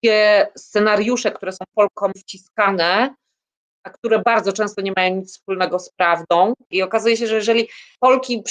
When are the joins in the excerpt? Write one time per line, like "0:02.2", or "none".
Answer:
0:06.7